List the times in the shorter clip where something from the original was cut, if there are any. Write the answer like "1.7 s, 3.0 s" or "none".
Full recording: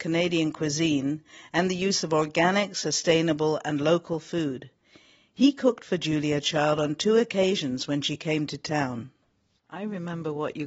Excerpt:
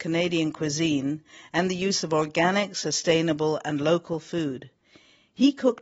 none